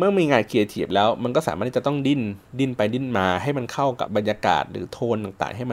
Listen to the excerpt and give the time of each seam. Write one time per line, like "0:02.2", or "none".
0:04.1